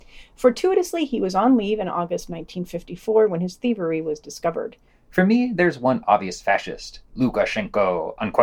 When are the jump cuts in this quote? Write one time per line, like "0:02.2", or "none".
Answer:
0:04.9